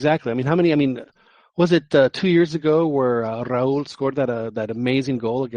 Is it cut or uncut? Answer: uncut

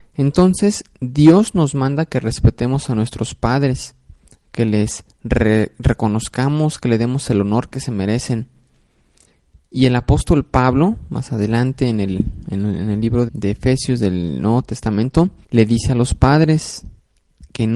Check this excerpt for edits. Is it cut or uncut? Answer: cut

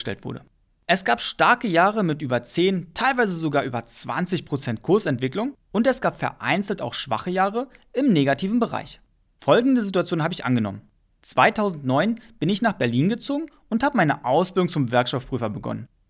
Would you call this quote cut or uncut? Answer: uncut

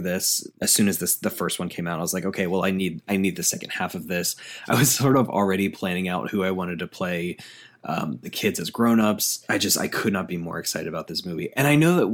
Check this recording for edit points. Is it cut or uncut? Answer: uncut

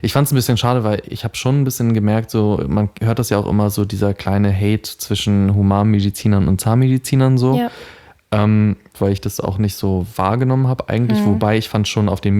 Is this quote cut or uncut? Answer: cut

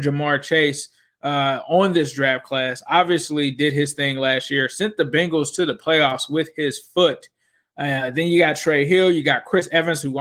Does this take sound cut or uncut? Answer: uncut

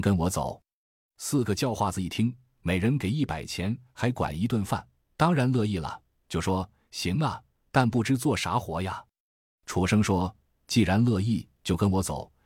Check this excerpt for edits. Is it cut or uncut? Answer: uncut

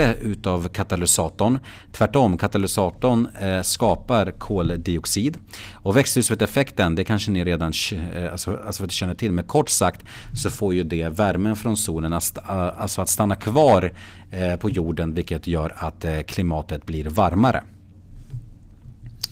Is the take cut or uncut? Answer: uncut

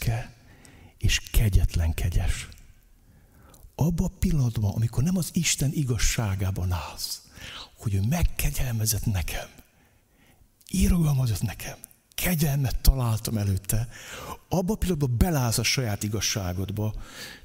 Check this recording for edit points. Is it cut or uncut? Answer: uncut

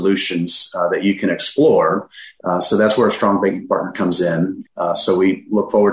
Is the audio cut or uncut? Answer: cut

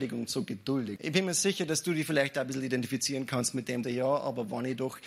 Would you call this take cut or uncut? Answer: cut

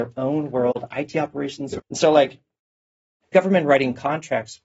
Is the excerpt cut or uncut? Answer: cut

